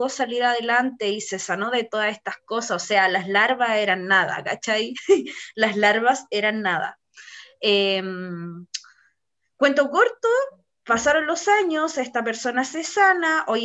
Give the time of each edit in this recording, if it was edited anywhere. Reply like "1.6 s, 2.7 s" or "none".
none